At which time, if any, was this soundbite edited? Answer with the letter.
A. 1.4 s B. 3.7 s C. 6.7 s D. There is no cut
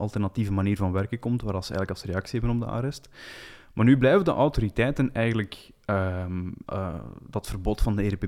C